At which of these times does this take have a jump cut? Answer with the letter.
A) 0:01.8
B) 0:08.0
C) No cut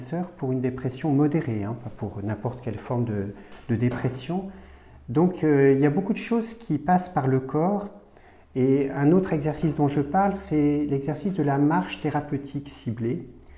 C